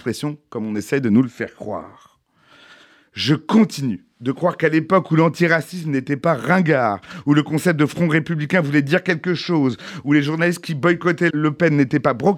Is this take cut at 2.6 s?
no; 1 cut; at 11.3 s

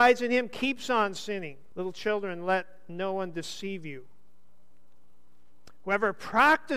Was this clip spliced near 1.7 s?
yes; 1 cut; at 1.7 s

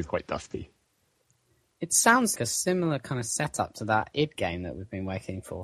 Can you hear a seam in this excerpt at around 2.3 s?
yes; 1 cut; at 2.3 s

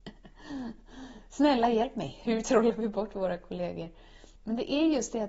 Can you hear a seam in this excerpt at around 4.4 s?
yes; 1 cut; at 4.4 s

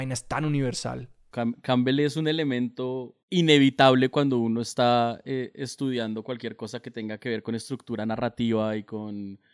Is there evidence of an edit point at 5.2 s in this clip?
no; 2 cuts; at 1.3 s, 3.2 s

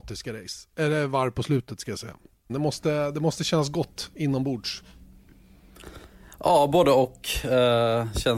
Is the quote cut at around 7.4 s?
no; 1 cut; at 2.5 s

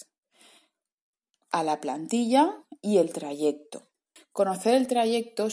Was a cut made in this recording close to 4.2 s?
yes; 1 cut; at 4.2 s

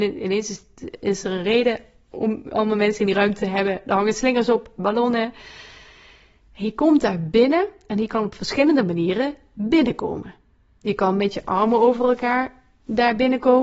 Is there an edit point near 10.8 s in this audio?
no; 0 cuts

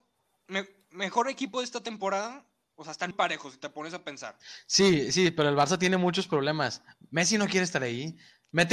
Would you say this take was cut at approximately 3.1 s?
yes; 1 cut; at 3.1 s

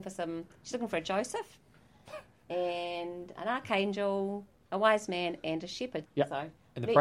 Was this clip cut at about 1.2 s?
no; 2 cuts; at 3.4 s, 6.1 s

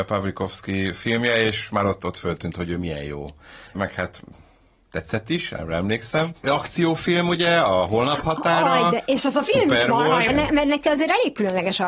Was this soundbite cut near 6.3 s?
yes; 2 cuts; at 6.3 s, 10.3 s

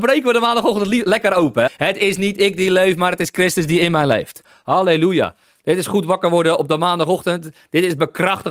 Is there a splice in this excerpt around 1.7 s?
yes; 1 cut; at 1.7 s

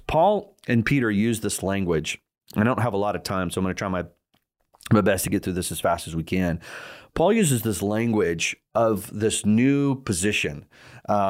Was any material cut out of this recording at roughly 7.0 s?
no; 0 cuts

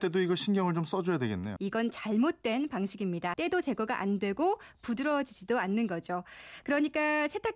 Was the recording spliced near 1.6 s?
yes; 2 cuts; at 1.6 s, 3.3 s

